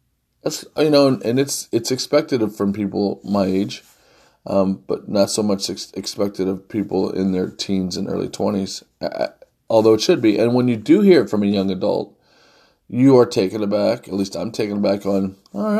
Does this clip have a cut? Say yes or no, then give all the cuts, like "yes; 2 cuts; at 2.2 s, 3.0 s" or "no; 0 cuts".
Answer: no; 0 cuts